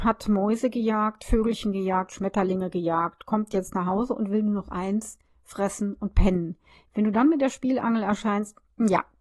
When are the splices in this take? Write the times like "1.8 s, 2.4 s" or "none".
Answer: none